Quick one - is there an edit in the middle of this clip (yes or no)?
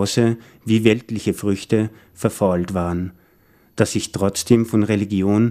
no